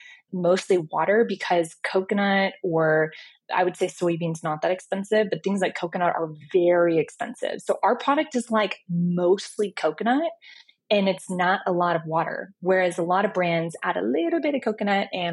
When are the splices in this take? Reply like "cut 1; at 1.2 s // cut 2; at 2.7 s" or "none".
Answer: none